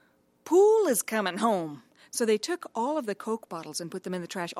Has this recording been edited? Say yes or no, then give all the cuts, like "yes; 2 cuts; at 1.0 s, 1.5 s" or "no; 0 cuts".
no; 0 cuts